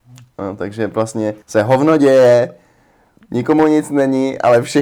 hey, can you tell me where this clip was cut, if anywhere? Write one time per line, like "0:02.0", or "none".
0:01.4